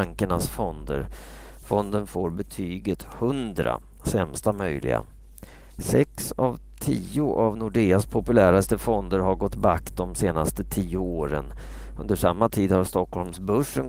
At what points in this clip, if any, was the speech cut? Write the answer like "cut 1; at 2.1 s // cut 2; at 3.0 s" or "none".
none